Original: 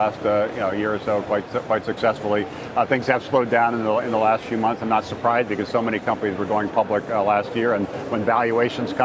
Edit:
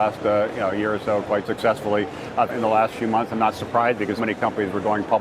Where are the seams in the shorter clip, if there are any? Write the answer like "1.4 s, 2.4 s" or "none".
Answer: 1.4 s, 2.5 s, 4.2 s